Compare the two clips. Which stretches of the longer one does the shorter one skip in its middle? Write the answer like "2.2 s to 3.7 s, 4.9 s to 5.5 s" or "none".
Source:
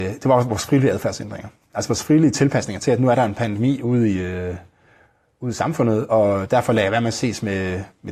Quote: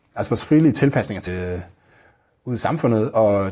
2.8 s to 4.2 s